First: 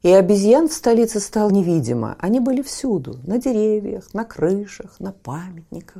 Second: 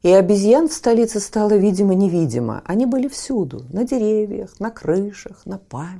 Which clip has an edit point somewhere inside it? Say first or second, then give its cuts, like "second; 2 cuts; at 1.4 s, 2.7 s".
first; 1 cut; at 1.5 s